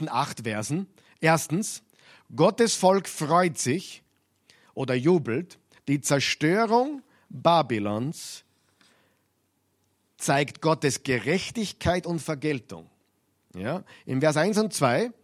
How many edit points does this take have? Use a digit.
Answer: 1